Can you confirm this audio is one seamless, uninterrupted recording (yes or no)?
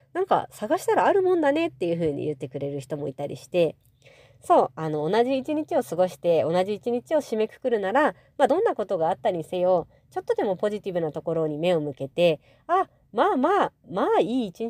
yes